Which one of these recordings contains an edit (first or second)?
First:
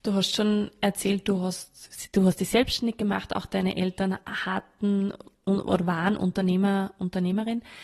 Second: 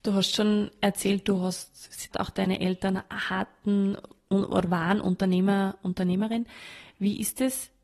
second